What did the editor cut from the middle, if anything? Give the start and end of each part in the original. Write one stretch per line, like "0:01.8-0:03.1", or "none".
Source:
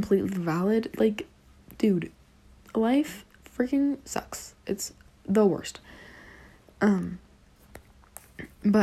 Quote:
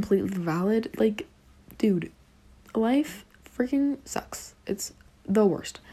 none